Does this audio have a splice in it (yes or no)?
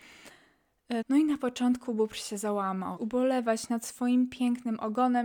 yes